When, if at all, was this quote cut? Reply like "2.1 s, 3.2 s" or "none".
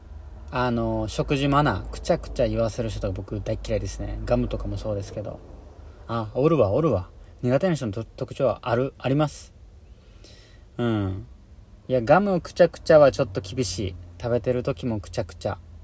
none